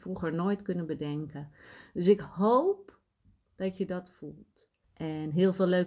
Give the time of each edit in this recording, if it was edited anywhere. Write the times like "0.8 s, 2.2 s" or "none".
4.8 s